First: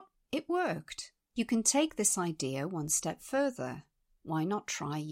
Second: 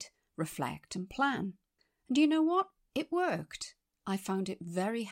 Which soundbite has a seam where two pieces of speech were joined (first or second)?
first